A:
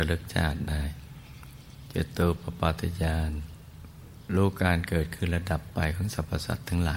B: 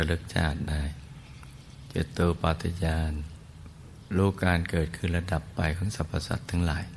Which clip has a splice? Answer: B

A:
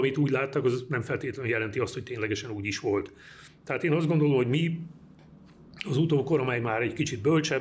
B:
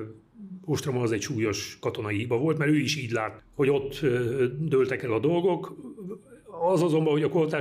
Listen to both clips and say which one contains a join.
B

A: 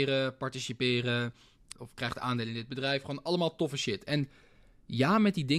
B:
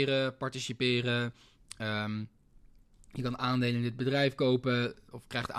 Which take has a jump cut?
A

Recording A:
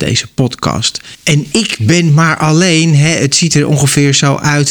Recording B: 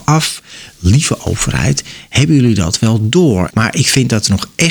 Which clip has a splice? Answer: B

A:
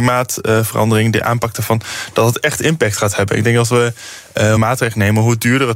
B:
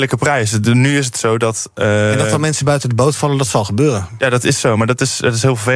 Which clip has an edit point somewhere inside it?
A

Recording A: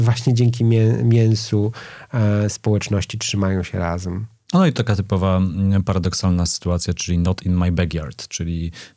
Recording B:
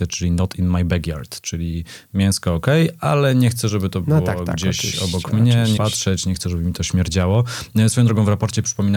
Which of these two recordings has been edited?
B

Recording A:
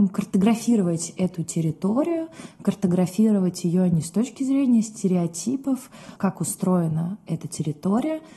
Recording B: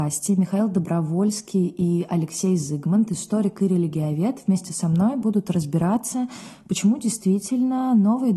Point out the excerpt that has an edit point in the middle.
A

